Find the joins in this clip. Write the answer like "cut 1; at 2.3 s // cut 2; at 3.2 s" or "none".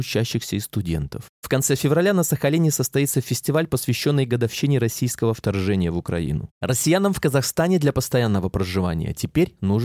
cut 1; at 1.3 s // cut 2; at 6.5 s